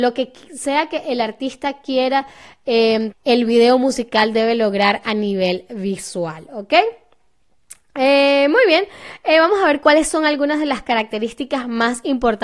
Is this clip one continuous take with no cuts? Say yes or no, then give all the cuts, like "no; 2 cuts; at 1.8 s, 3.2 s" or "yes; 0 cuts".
no; 1 cut; at 3.1 s